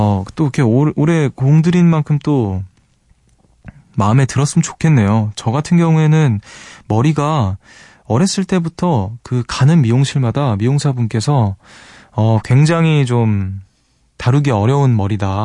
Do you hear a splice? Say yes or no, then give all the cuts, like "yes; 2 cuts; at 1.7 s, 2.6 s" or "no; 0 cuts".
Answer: no; 0 cuts